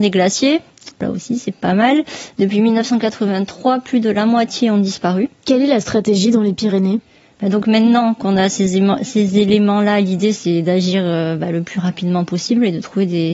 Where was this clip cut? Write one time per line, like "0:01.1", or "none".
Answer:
0:05.4